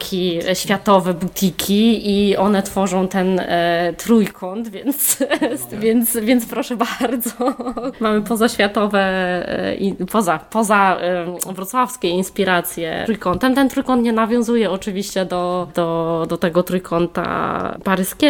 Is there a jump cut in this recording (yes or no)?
no